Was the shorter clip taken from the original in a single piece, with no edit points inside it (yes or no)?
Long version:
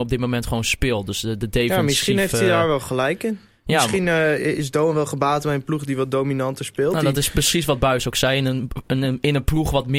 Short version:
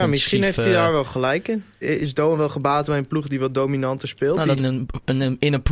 no